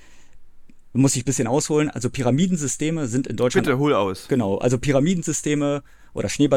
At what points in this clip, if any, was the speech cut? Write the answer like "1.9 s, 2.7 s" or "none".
none